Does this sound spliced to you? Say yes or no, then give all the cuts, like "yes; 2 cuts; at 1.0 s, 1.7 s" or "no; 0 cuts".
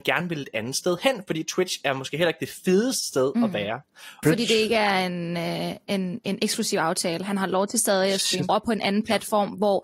yes; 2 cuts; at 4.2 s, 8.5 s